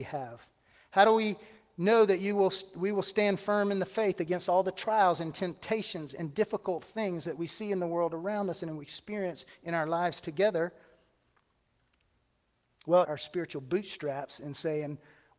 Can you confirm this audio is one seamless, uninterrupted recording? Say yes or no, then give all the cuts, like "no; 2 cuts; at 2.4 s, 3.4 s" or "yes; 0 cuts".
no; 1 cut; at 13.0 s